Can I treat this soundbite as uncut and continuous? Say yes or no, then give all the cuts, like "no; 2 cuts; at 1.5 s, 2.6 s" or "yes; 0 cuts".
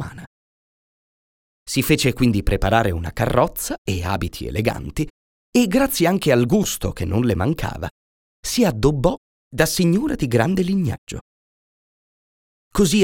yes; 0 cuts